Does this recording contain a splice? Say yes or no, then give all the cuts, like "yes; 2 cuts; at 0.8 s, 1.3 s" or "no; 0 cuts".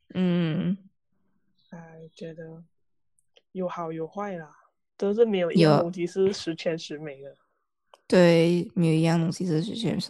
no; 0 cuts